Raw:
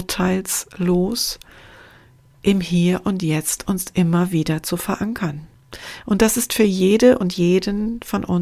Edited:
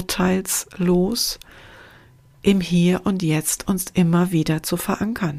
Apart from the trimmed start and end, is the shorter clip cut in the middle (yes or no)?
no